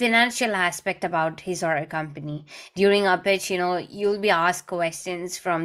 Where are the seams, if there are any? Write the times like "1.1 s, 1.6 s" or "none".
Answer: none